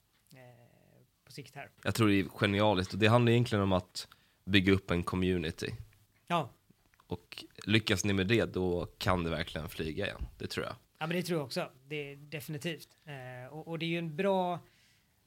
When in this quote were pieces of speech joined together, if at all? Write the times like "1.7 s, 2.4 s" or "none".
1.8 s